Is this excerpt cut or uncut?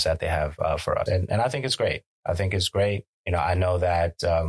cut